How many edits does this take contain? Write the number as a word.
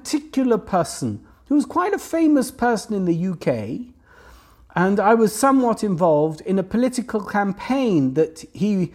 zero